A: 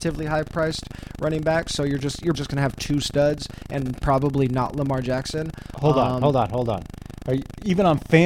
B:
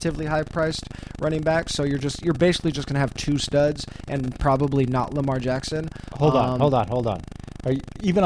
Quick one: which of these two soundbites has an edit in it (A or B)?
A